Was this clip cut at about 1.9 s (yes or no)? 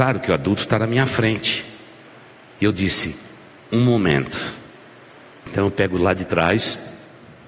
no